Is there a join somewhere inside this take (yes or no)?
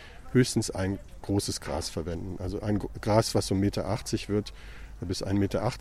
no